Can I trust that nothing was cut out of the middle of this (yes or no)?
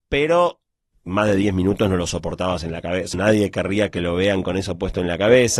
no